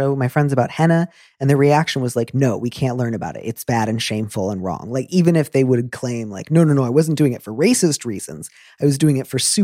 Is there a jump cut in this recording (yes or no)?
no